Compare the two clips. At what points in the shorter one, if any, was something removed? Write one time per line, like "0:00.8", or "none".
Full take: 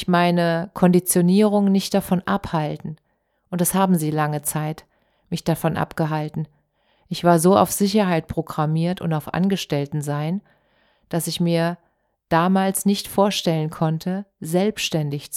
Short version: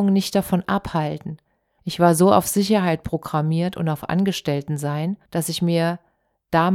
0:01.8
0:05.2